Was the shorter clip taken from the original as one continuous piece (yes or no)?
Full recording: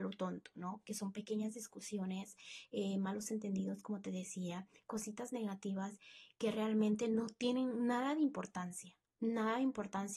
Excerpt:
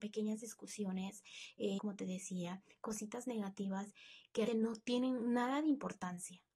no